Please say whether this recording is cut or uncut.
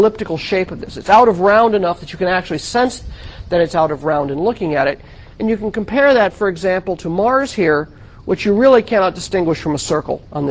uncut